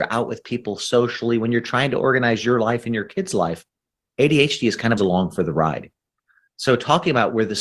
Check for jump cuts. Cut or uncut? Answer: cut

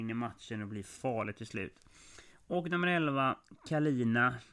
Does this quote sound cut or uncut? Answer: uncut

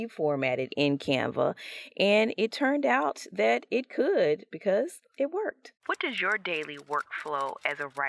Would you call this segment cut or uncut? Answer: cut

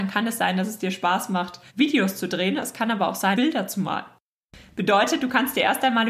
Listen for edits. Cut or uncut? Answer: cut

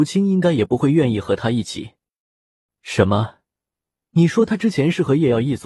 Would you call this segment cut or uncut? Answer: uncut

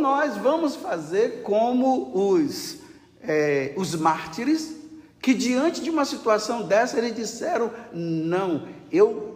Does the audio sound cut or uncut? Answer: uncut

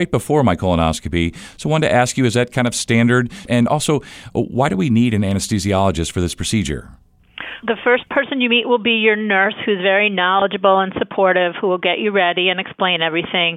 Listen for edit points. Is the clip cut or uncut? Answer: cut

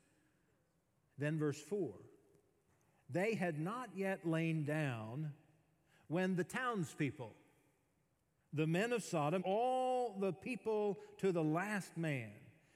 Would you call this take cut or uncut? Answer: cut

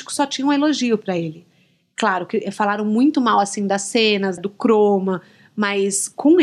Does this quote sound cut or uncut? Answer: cut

